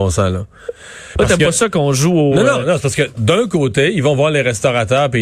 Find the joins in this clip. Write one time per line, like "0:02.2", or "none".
none

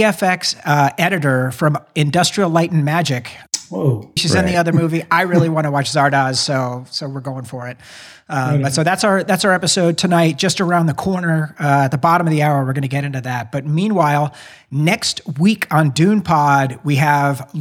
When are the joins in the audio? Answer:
0:04.2

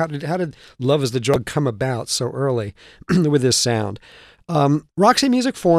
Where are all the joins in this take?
none

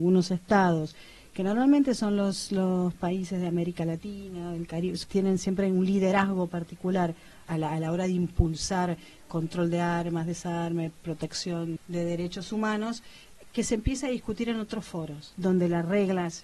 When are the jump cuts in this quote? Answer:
0:11.8

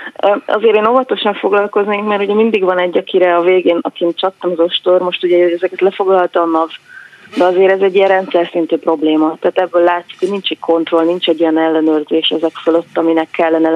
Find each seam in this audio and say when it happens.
none

